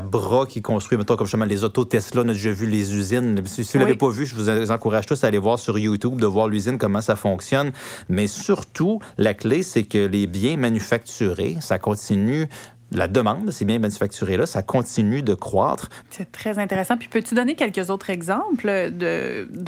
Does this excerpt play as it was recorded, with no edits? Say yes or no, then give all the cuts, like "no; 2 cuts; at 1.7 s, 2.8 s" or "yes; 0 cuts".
no; 2 cuts; at 8.1 s, 16.0 s